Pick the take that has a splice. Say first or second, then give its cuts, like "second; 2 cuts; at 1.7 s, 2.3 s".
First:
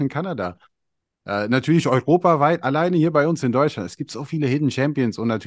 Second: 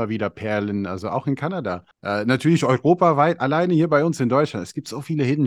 second; 1 cut; at 1.9 s